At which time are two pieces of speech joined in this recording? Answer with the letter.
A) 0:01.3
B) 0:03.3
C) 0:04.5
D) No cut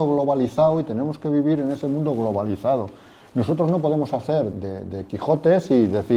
C